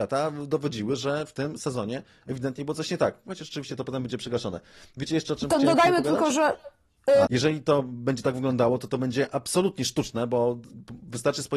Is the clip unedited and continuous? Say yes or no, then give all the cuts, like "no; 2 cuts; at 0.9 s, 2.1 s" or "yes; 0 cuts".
no; 1 cut; at 7.3 s